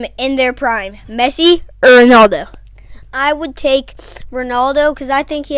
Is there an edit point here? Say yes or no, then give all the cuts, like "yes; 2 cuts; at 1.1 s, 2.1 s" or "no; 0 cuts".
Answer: no; 0 cuts